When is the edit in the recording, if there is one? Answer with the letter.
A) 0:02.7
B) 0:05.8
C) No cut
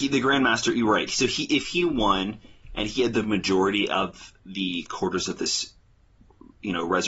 C